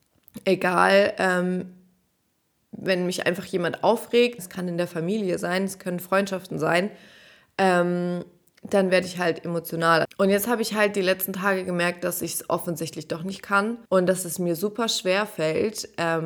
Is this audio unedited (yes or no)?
no